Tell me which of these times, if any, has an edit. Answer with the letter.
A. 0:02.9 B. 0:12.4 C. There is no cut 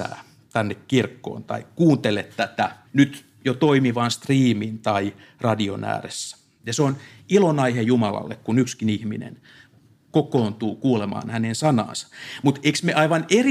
A